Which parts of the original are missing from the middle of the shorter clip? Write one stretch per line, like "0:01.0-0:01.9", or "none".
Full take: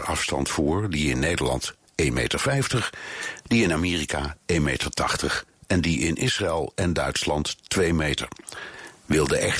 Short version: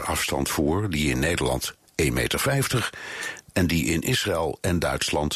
0:03.4-0:05.5

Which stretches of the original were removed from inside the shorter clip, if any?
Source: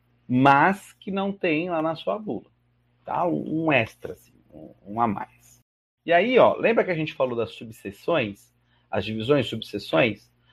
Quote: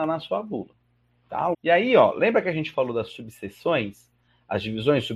0:03.3-0:06.0

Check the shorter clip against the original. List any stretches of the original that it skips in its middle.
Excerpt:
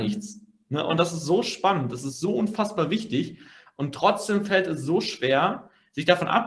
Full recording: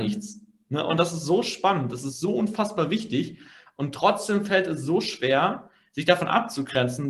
none

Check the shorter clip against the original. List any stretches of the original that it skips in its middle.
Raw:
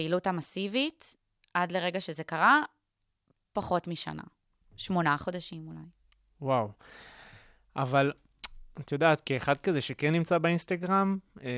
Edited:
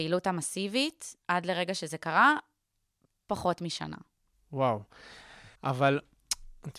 0:01.2-0:01.5
0:04.6-0:06.2
0:07.4-0:07.7

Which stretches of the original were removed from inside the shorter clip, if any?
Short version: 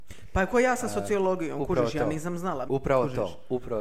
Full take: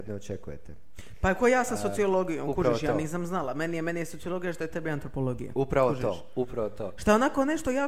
0:03.5-0:05.5

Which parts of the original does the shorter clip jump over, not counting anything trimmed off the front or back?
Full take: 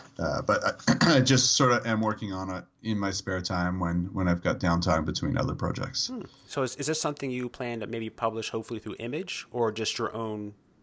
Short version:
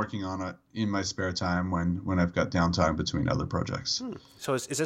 none

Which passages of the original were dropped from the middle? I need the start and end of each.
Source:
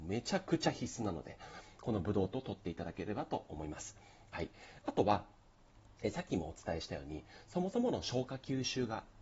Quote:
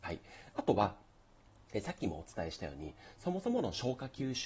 none

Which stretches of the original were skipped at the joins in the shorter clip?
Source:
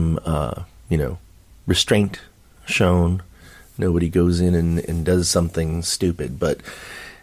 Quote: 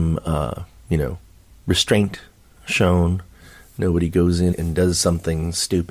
0:04.5-0:04.8

